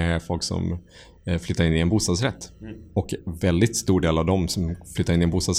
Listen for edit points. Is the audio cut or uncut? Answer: uncut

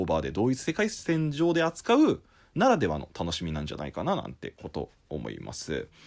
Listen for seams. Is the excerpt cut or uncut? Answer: uncut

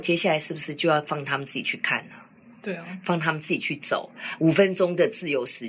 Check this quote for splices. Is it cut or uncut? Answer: uncut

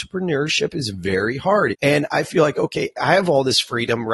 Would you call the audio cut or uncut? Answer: cut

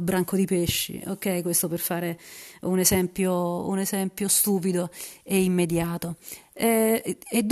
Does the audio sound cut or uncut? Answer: uncut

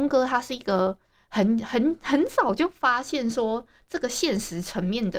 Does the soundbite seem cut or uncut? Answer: uncut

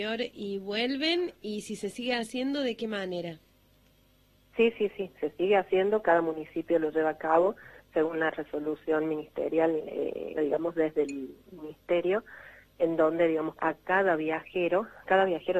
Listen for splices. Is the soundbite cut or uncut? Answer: cut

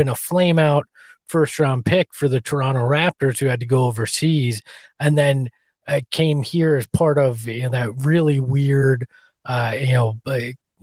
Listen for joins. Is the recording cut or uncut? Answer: uncut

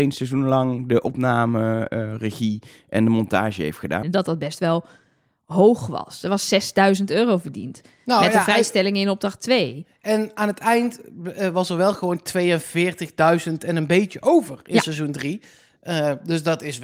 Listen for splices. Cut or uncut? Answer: cut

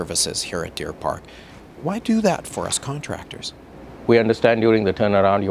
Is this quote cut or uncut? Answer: uncut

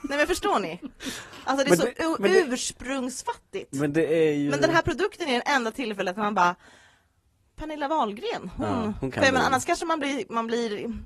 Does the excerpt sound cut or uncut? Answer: uncut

